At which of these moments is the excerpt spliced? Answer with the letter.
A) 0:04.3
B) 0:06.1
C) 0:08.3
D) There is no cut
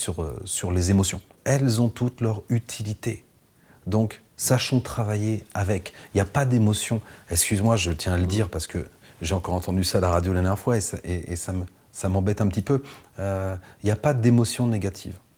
A